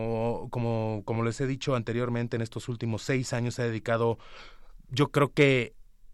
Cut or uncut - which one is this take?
uncut